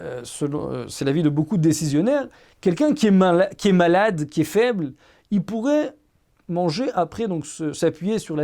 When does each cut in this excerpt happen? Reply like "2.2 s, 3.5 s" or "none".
none